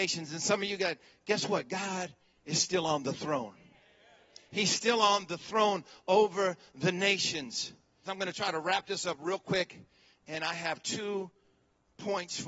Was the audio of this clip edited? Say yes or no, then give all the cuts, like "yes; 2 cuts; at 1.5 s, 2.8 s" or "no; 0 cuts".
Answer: yes; 1 cut; at 8.0 s